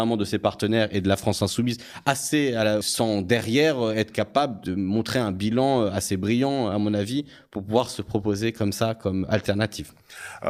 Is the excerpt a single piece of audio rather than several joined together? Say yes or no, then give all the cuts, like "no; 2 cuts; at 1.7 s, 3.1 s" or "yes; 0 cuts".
no; 1 cut; at 2.8 s